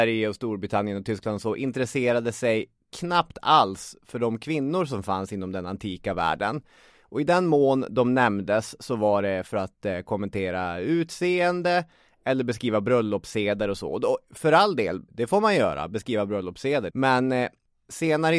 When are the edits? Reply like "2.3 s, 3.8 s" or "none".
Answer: 15.1 s, 16.9 s